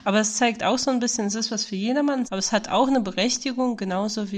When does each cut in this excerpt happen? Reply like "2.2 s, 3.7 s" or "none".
2.2 s